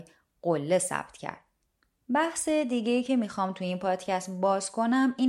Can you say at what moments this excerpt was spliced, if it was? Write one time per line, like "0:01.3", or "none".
0:02.0